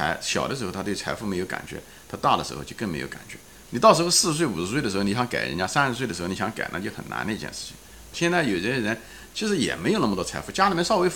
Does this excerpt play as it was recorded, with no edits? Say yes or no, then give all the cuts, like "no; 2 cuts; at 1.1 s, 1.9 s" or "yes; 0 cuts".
no; 2 cuts; at 3.7 s, 8.1 s